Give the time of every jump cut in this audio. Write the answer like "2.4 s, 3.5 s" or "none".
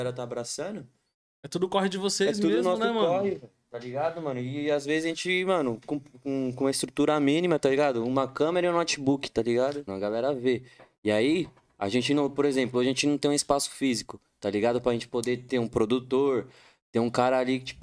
9.9 s